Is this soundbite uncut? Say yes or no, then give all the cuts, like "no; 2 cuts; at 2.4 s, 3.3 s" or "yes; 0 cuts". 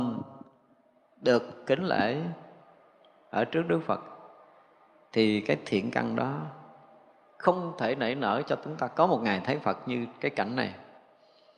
yes; 0 cuts